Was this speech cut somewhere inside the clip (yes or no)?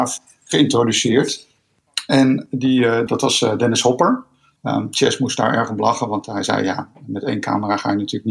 yes